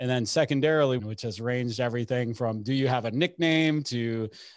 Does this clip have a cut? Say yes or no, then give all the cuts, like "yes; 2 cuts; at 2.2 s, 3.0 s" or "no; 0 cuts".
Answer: yes; 1 cut; at 1.0 s